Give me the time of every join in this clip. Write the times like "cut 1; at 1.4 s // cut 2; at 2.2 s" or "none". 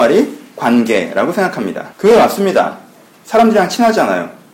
cut 1; at 1.9 s